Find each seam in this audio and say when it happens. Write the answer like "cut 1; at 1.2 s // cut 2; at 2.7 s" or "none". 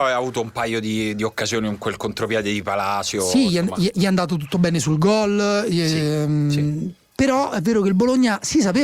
none